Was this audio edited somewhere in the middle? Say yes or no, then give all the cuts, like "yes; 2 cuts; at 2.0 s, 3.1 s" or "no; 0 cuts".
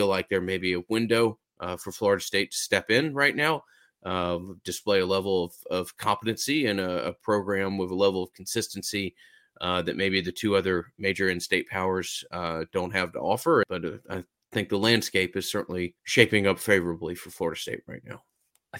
yes; 2 cuts; at 13.6 s, 16.0 s